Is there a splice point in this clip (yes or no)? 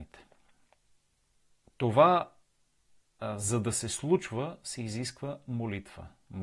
no